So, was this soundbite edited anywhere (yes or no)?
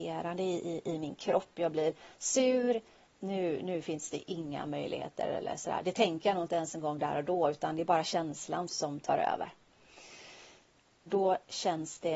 yes